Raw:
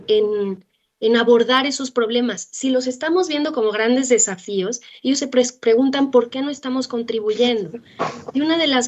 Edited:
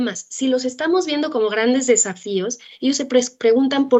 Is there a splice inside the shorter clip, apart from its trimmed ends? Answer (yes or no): no